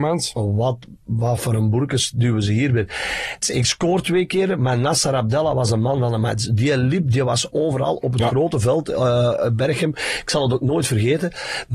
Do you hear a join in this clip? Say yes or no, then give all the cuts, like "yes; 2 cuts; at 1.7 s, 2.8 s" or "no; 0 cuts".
yes; 1 cut; at 3.4 s